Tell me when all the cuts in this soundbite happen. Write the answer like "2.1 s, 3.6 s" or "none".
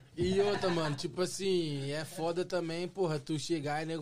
none